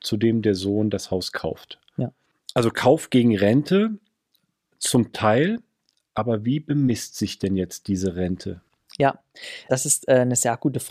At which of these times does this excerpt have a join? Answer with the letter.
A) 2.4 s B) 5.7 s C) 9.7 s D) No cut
C